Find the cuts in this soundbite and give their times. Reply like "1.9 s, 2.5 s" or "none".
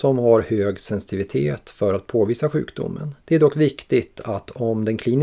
3.2 s